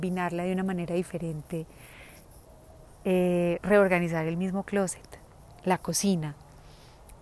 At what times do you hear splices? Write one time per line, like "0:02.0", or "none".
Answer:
0:02.8